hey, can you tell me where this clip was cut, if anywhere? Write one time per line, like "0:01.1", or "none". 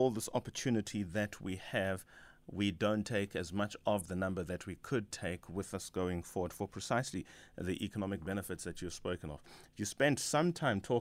none